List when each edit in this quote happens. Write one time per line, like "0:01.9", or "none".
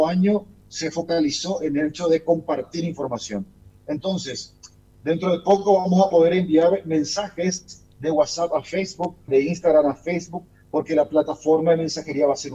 0:09.3